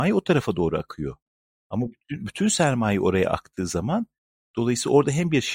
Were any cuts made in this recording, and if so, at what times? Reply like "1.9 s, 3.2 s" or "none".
none